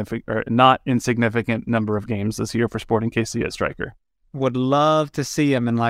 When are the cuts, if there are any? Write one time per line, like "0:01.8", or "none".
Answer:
none